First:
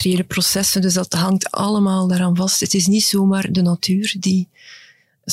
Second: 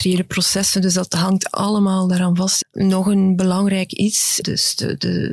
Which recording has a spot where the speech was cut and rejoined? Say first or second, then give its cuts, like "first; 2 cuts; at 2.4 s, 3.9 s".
second; 2 cuts; at 2.6 s, 4.4 s